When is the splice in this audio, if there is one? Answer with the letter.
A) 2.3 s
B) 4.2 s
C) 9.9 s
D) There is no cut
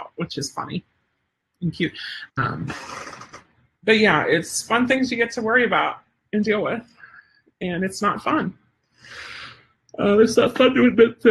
A